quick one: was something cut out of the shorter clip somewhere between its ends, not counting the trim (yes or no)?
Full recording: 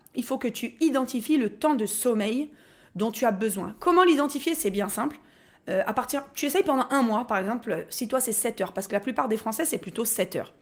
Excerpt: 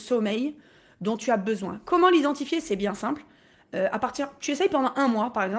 no